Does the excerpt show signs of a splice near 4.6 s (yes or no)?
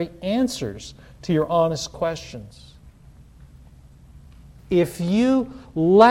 yes